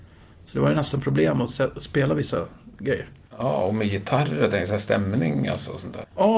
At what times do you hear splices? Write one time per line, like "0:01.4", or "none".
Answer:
none